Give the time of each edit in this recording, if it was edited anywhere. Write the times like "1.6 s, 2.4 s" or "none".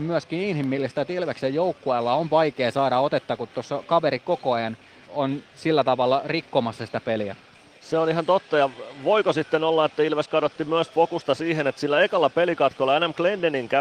5.1 s